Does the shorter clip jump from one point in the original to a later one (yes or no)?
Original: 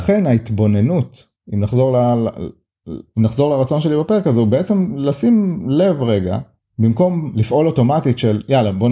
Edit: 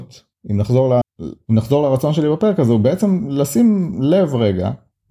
yes